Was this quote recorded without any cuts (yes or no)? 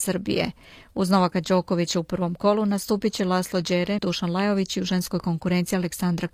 no